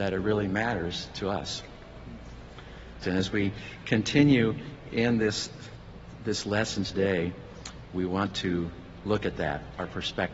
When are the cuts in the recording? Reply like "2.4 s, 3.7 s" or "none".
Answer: 3.0 s